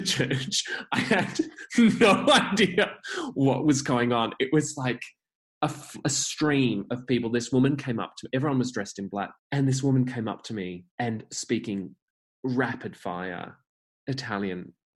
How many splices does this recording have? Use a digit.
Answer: 2